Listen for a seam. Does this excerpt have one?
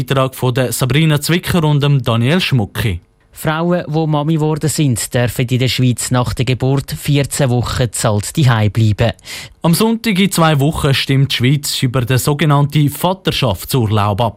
yes; 1 cut; at 9.5 s

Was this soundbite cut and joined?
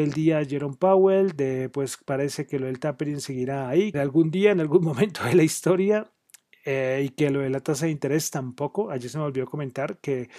yes; 1 cut; at 3.9 s

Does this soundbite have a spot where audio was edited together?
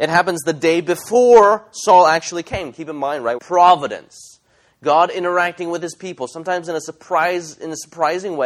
yes; 1 cut; at 3.4 s

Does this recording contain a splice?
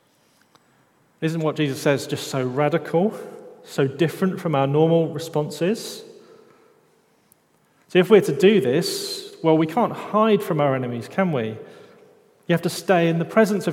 no; 0 cuts

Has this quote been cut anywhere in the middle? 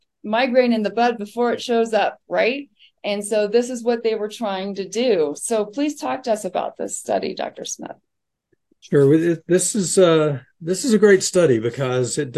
no; 0 cuts

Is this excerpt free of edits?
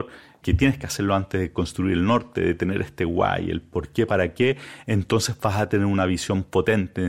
yes; 0 cuts

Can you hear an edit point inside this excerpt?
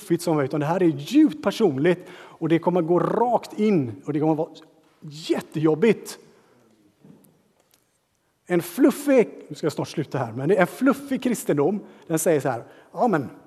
no; 0 cuts

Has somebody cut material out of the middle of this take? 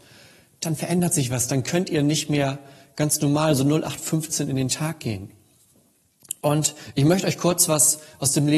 no; 0 cuts

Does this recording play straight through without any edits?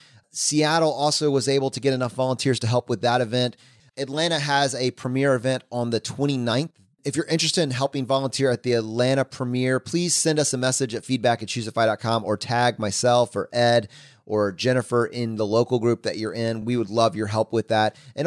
yes; 0 cuts

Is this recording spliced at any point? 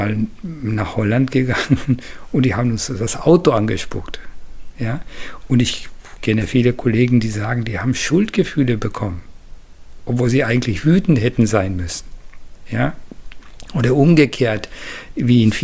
no; 0 cuts

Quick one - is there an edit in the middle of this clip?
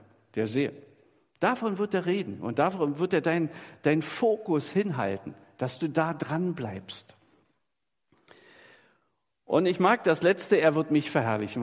no; 0 cuts

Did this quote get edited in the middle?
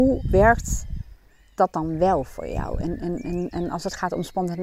no; 0 cuts

